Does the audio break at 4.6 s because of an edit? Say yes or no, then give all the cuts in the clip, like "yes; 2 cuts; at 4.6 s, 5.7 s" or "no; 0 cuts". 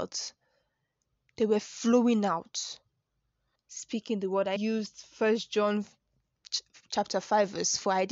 yes; 2 cuts; at 3.6 s, 4.6 s